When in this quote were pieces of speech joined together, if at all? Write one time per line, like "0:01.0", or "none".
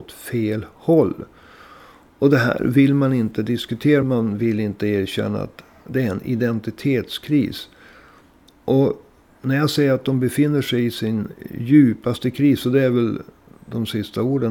0:04.0